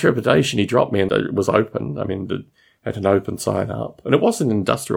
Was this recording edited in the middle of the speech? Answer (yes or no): yes